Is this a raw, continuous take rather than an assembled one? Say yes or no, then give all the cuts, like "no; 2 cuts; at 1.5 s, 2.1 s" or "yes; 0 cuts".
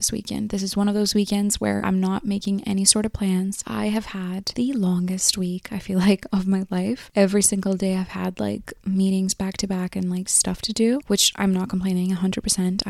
no; 1 cut; at 3.6 s